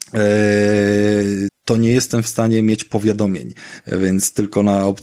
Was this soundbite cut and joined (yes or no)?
yes